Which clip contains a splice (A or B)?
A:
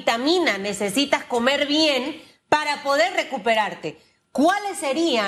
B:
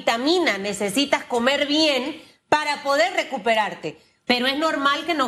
B